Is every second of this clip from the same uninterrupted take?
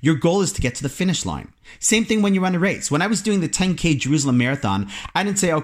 yes; 0 cuts

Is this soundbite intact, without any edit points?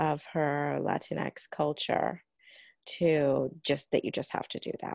yes; 0 cuts

